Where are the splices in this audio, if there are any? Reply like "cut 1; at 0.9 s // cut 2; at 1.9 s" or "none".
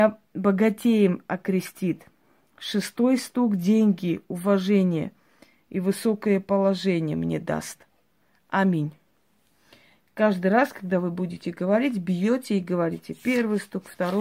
none